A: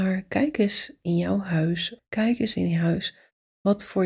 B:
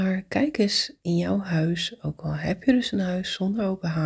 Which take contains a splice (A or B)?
A